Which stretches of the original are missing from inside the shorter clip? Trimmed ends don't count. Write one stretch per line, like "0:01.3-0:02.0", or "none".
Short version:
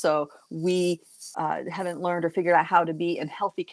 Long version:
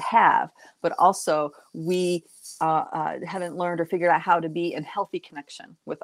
0:02.6-0:02.9